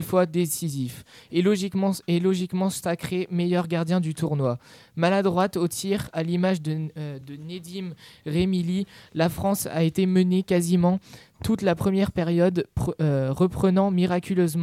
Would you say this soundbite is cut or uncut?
uncut